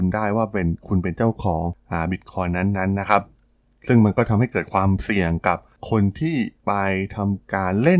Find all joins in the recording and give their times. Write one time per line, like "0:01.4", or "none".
none